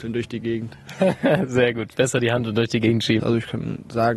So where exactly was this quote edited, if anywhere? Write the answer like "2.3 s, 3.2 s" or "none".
3.2 s